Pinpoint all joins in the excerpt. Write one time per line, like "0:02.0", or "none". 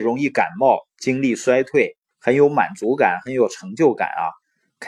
0:02.1

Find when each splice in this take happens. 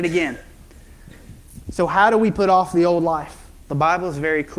0:03.6

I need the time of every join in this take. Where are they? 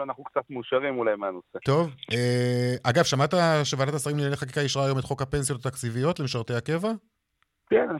0:01.6

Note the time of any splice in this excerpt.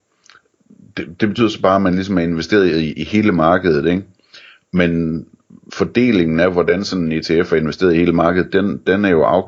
none

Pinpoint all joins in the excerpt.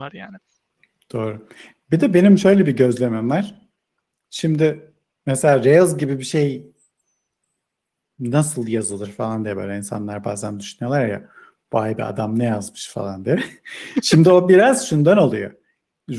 none

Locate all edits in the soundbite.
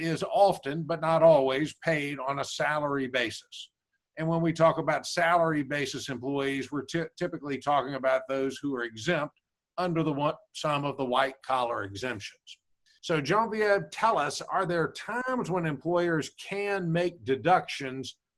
0:04.0
0:13.0

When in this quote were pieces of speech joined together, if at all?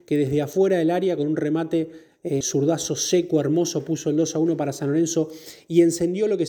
0:02.4

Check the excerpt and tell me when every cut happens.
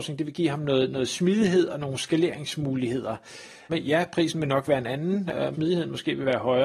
0:03.7
0:05.5

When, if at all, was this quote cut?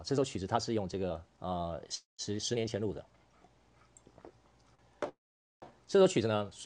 none

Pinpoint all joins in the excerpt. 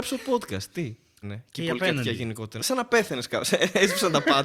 0:01.2
0:02.6

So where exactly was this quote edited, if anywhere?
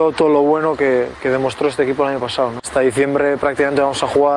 0:02.6

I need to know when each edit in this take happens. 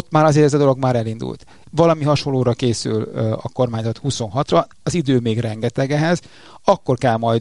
0:01.6

